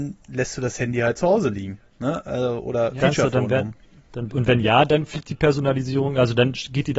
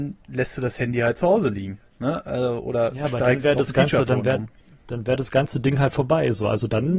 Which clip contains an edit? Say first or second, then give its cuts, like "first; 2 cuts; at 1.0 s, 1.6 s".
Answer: first; 2 cuts; at 3.0 s, 4.3 s